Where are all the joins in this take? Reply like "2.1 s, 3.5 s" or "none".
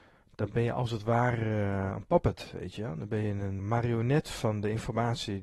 3.6 s